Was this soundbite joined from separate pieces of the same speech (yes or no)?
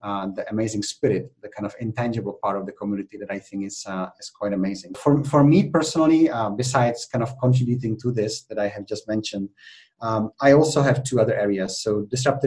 yes